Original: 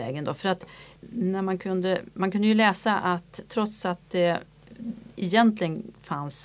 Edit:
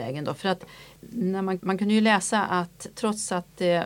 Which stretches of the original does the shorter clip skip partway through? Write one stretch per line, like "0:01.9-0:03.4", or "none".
0:01.6-0:02.1